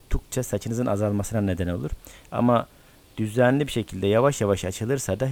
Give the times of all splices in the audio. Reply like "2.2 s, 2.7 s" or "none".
none

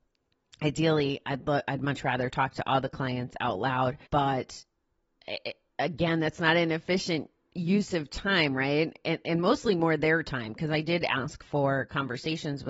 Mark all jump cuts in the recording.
4.0 s

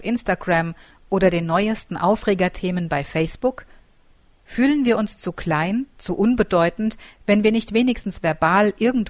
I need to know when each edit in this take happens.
none

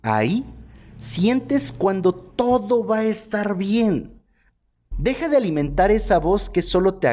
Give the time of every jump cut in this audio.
4.9 s

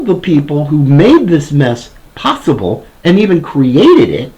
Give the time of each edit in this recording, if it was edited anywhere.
none

